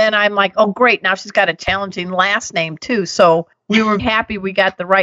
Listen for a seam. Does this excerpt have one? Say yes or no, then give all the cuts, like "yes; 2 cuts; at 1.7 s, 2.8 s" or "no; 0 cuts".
yes; 1 cut; at 4.0 s